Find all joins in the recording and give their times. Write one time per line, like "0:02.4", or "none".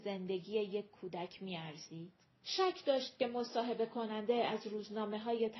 0:02.4